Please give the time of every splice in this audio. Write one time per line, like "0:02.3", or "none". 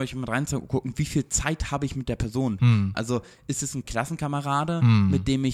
0:02.9